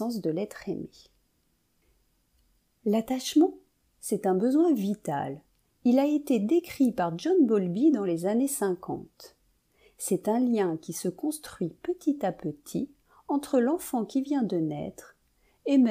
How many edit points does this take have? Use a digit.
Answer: 0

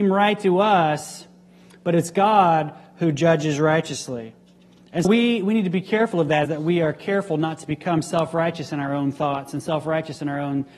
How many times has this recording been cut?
2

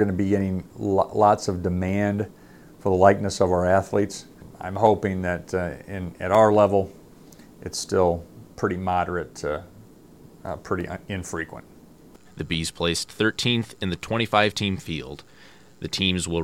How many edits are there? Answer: 1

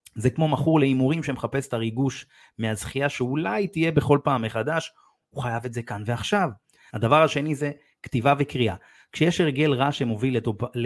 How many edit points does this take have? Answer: 1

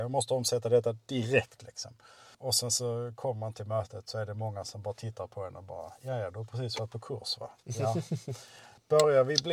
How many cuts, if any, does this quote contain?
0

